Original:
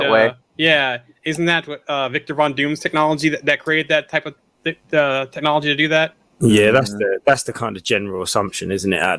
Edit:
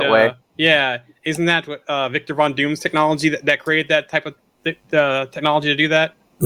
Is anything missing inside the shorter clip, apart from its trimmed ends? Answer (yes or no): no